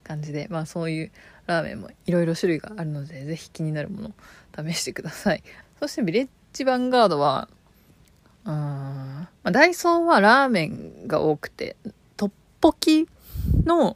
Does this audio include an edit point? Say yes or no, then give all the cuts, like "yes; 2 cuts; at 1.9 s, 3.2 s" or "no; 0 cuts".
yes; 2 cuts; at 5.6 s, 9.4 s